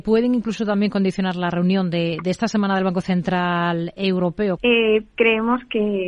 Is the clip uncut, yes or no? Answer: no